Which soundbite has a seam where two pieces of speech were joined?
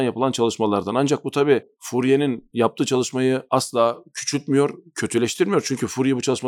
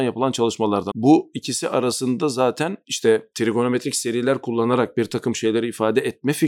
second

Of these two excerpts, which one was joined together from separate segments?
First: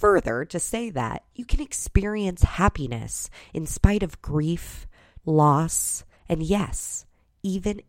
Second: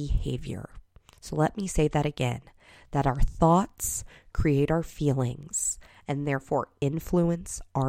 first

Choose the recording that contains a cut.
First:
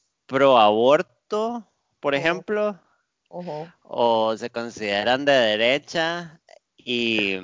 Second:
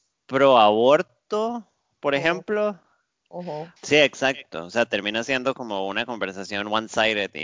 second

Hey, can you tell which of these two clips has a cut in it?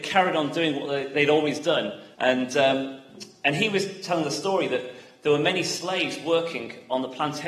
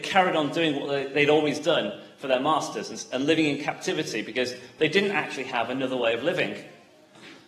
first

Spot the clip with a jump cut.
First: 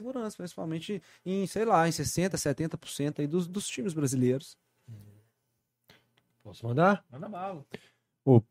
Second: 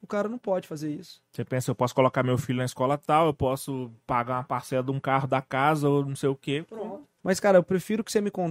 second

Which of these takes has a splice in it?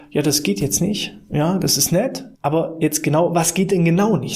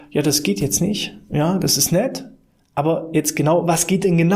first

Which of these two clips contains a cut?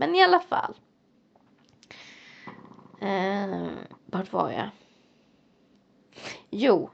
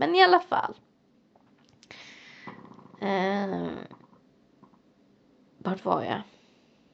first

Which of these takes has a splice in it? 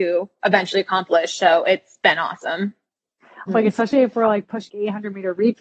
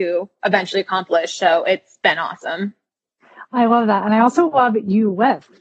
first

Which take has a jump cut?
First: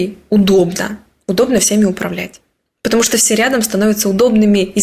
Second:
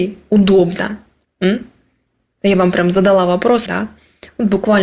second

